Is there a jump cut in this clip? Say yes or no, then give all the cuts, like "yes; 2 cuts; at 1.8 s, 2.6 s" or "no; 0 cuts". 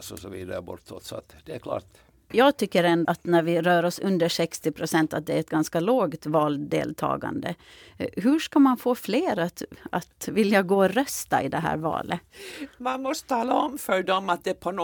yes; 1 cut; at 3.1 s